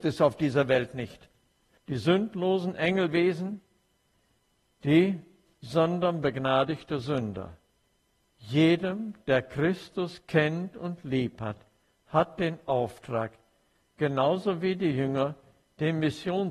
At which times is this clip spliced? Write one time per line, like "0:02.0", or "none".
0:01.8